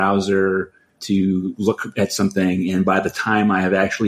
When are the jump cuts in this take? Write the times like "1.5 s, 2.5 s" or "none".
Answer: 1.0 s